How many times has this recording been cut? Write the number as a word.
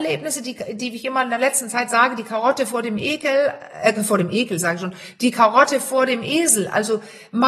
zero